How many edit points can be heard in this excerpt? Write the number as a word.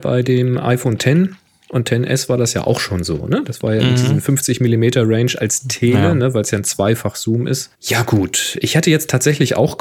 one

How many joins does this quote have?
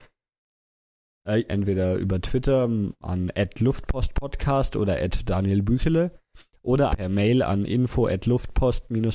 two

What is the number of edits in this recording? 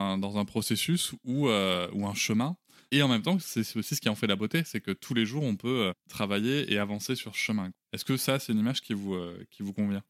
three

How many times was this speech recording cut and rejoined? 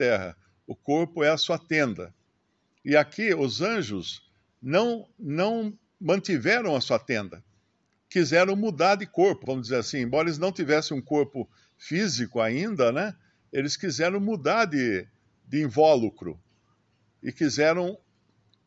one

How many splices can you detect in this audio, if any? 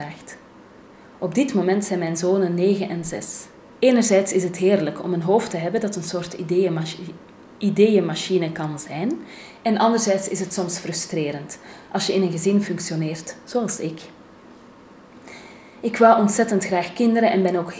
one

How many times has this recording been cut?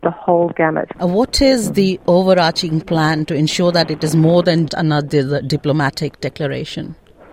two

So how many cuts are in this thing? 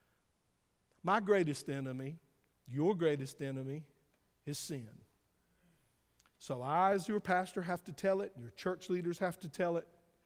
zero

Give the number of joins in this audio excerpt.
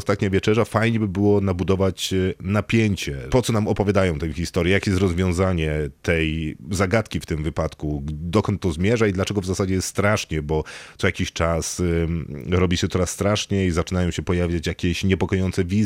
one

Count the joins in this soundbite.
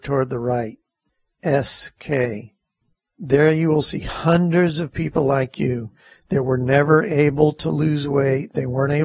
zero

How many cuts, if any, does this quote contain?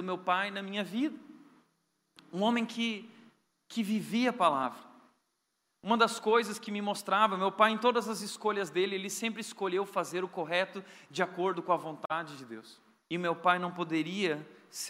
one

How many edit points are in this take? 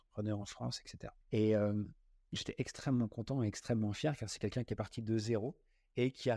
one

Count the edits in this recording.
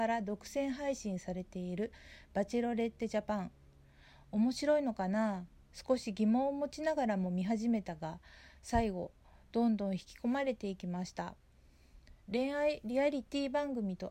one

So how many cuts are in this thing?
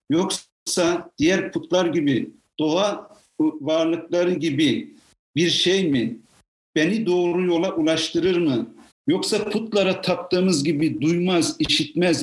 one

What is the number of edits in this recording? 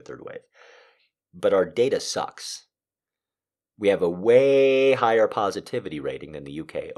one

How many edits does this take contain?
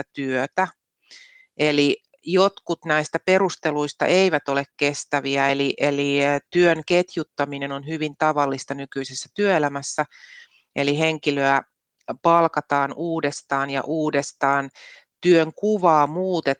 zero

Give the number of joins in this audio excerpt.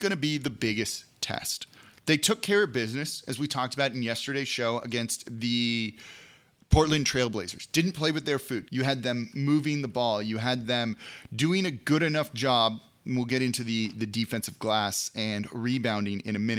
one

